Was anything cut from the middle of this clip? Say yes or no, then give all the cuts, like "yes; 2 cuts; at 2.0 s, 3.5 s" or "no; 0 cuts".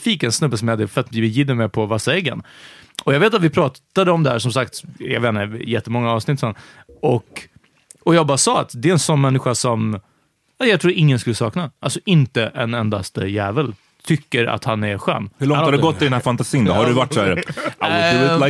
no; 0 cuts